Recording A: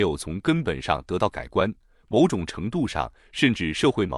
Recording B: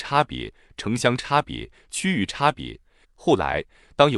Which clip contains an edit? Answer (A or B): B